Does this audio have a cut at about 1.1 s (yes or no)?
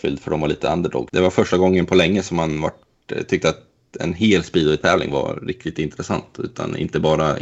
yes